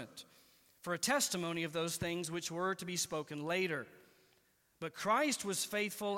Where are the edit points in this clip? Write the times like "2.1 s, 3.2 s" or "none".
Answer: none